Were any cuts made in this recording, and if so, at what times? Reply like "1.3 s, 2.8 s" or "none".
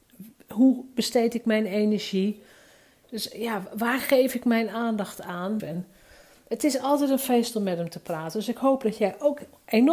5.6 s